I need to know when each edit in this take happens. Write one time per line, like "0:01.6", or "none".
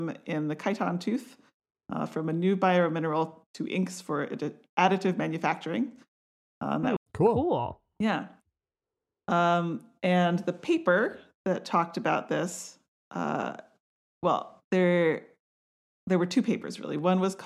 0:07.0